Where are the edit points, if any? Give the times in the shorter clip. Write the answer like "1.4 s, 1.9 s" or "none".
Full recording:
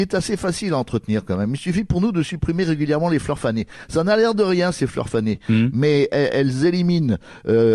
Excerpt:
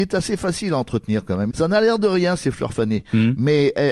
1.5 s

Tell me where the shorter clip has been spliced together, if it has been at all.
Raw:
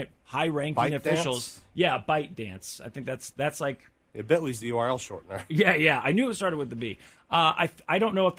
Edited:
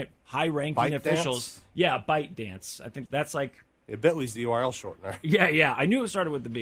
3.1 s

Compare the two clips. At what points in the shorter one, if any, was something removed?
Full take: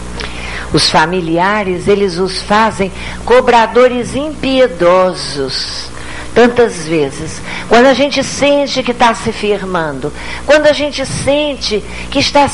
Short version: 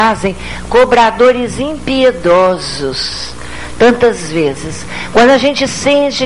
none

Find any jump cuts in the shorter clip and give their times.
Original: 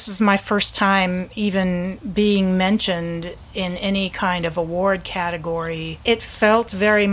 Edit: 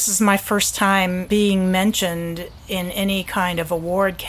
1.3 s

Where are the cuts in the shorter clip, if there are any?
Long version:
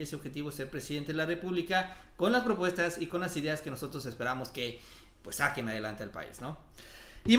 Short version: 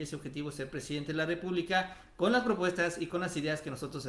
none

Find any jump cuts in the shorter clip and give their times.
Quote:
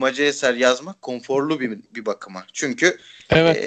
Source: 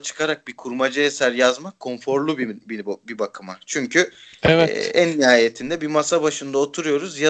1.9 s

